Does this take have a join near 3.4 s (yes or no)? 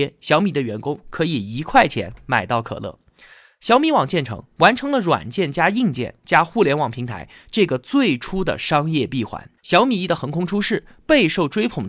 no